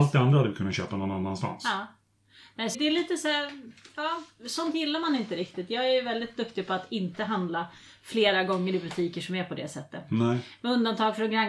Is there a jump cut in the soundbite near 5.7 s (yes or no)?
no